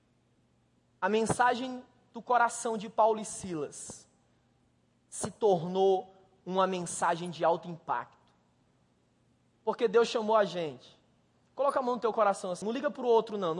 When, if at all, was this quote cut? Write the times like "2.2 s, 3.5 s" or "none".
9.5 s, 12.6 s